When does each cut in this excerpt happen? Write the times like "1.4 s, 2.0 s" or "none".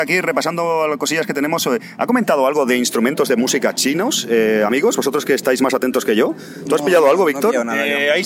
none